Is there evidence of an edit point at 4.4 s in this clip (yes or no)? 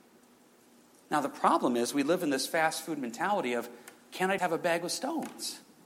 yes